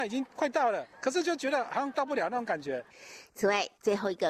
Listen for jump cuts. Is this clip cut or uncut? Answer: uncut